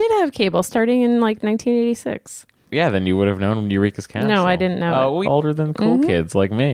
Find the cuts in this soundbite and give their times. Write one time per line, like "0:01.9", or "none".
0:05.2